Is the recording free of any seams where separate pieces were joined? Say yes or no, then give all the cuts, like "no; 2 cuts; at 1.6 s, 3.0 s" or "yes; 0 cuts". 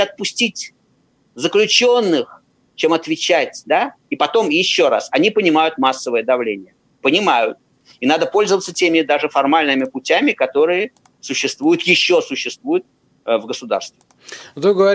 yes; 0 cuts